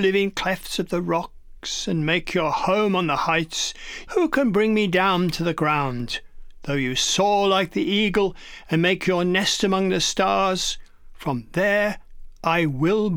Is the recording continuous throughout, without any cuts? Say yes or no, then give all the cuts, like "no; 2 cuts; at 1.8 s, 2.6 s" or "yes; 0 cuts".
no; 1 cut; at 4.1 s